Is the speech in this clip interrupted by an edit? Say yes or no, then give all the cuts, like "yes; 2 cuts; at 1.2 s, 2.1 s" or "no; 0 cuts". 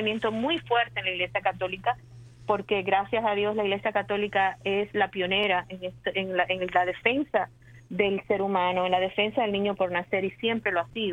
no; 0 cuts